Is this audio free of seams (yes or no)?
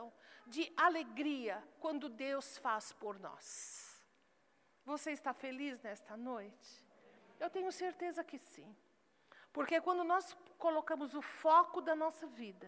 yes